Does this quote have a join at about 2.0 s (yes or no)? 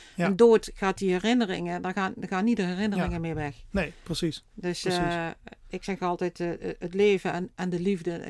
no